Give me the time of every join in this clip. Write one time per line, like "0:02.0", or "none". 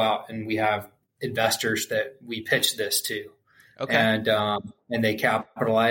none